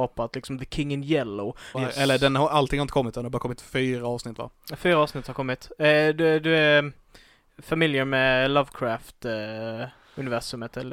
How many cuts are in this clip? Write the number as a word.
one